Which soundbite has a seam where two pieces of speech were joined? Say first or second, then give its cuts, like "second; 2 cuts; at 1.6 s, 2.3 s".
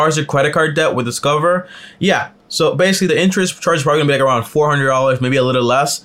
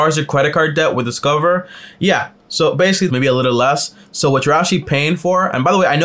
second; 1 cut; at 3.1 s